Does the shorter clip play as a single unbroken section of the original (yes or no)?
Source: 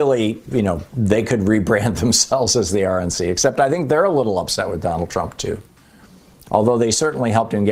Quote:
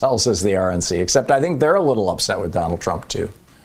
yes